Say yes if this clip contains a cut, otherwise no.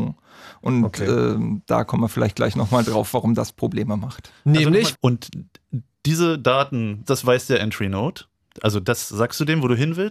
yes